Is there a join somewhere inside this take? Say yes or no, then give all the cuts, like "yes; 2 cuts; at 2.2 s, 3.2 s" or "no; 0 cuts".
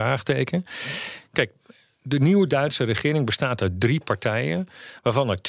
no; 0 cuts